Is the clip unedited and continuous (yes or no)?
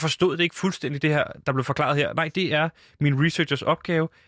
yes